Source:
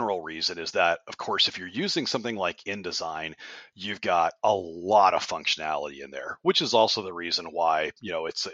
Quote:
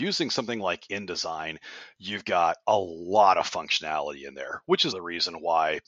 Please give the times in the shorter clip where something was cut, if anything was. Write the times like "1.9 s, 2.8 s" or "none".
4.9 s